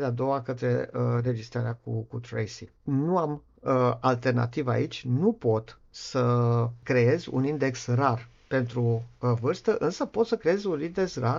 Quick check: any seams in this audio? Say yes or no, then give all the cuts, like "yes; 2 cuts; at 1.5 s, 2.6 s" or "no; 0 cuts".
yes; 1 cut; at 2.8 s